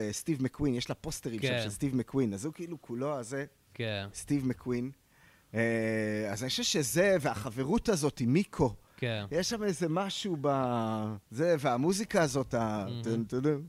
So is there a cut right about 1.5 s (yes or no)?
no